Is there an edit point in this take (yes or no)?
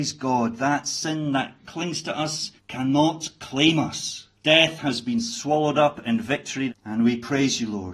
yes